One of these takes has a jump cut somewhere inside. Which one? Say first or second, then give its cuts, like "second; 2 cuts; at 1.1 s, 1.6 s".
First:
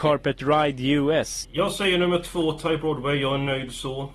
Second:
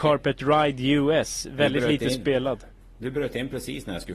first; 1 cut; at 1.4 s